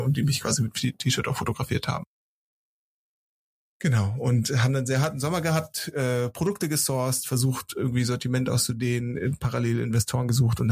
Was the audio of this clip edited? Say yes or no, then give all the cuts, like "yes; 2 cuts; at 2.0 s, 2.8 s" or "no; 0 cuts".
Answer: no; 0 cuts